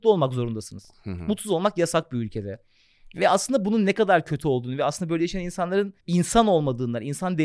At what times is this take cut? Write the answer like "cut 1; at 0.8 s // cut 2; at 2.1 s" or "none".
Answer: cut 1; at 6.0 s